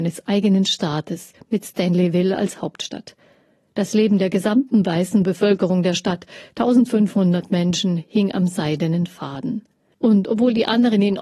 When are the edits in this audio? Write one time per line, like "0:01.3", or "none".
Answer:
0:09.9